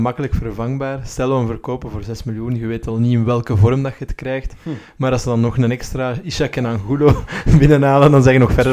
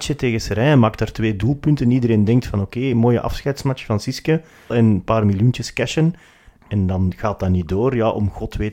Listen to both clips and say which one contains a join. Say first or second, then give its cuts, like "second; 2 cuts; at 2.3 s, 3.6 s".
second; 1 cut; at 4.7 s